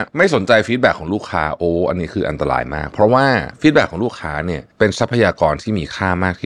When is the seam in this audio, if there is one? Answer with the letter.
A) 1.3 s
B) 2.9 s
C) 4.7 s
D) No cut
C